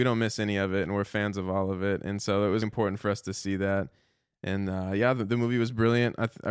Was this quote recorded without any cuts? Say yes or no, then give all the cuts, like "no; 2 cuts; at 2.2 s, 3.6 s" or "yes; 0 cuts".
no; 1 cut; at 2.6 s